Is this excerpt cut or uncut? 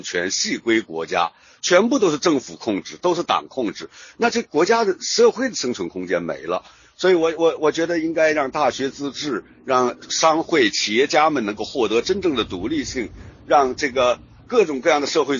uncut